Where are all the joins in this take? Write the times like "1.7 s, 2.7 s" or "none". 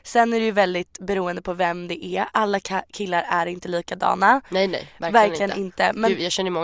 none